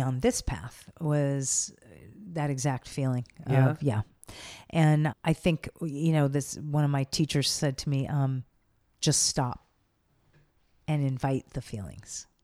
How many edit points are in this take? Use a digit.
1